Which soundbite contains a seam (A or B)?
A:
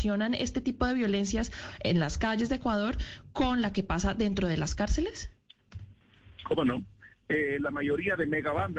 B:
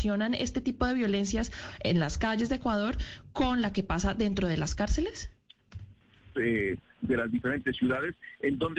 B